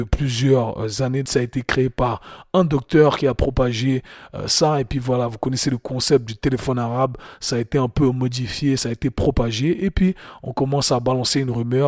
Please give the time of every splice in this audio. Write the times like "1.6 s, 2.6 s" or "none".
1.3 s